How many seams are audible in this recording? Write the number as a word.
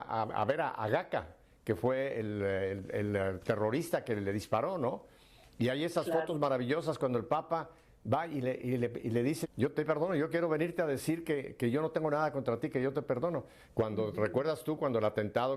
two